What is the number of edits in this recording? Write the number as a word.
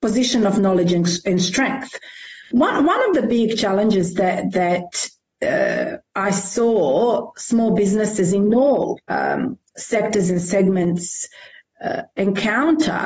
two